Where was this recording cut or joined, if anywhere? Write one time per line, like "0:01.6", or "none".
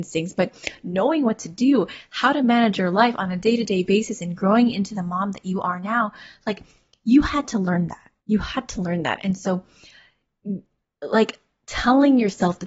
0:08.2